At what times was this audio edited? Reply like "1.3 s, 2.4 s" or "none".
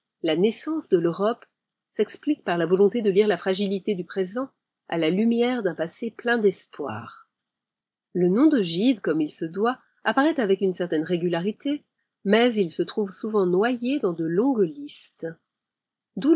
none